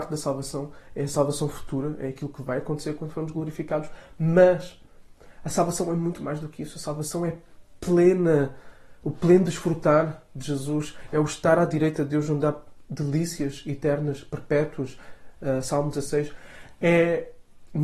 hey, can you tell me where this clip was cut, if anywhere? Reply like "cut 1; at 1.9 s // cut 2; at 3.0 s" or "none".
none